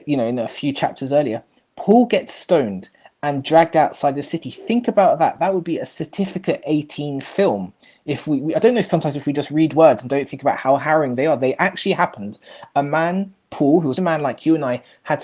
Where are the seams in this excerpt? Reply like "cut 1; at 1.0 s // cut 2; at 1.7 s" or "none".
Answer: cut 1; at 8.5 s // cut 2; at 14.0 s